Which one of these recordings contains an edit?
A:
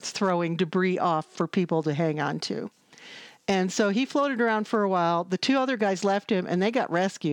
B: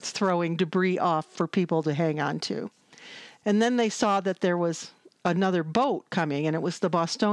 B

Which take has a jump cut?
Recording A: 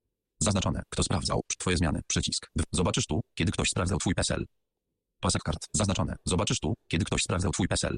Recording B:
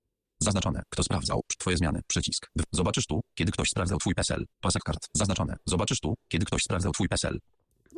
B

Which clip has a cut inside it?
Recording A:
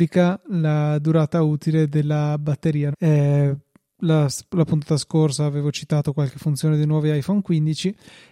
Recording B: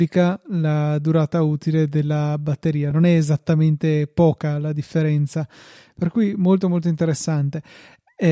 A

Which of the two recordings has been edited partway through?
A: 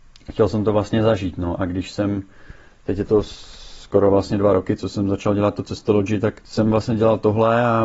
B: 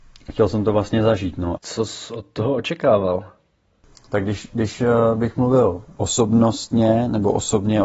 B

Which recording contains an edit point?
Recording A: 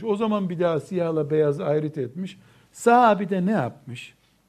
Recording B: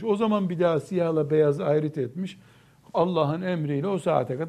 A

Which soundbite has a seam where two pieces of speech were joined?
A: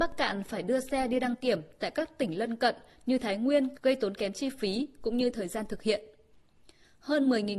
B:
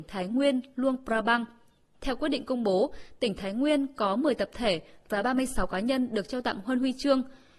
A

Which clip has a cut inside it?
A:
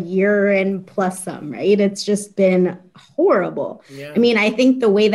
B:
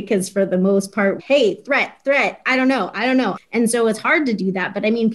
B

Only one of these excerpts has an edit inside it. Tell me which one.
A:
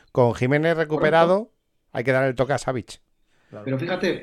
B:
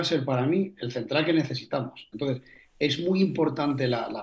B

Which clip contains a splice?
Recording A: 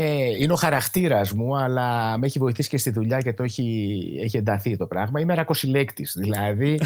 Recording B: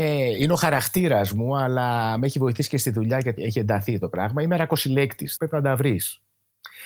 B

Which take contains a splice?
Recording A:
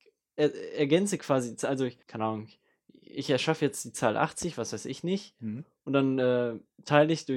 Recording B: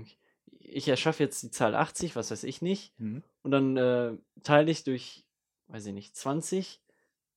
A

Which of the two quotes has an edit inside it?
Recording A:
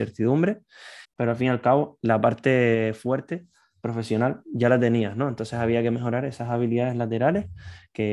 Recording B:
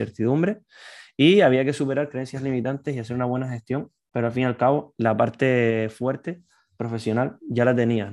A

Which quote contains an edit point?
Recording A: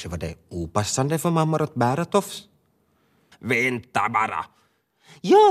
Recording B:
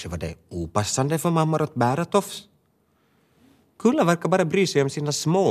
A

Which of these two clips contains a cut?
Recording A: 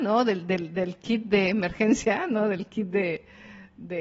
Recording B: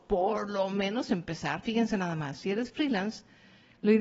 B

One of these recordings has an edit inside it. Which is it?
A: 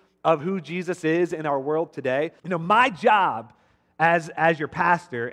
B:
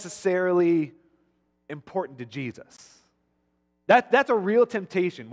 A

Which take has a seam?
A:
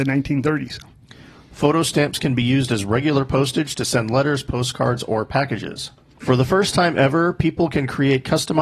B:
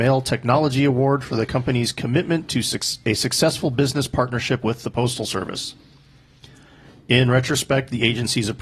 A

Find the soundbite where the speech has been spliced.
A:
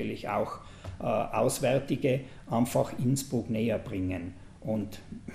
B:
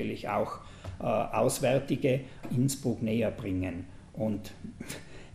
B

